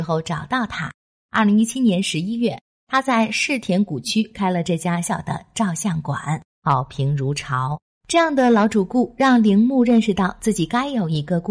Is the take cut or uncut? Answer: cut